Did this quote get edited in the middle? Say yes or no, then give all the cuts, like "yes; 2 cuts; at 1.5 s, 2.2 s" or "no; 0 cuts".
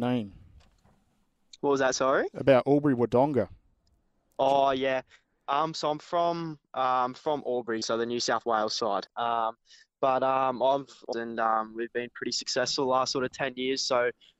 yes; 2 cuts; at 9.1 s, 11.1 s